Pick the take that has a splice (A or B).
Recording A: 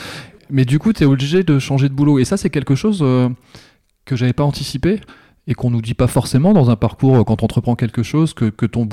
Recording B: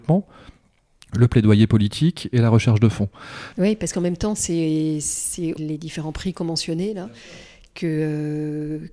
B